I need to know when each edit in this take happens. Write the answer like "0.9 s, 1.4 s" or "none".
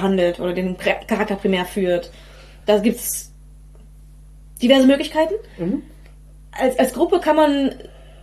none